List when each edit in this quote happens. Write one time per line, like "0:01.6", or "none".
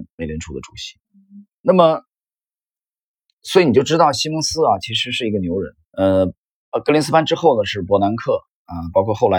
0:01.6
0:05.8